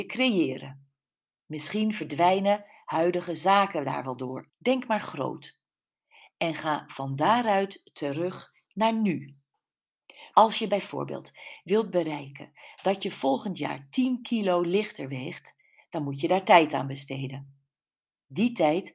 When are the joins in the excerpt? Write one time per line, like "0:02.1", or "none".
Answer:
0:04.5
0:10.3